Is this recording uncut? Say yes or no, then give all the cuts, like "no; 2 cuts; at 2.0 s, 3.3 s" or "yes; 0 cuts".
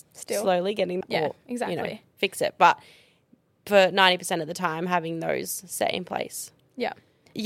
no; 1 cut; at 1.0 s